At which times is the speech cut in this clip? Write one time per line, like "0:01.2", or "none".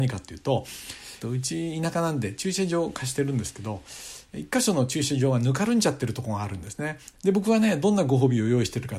0:01.2
0:07.1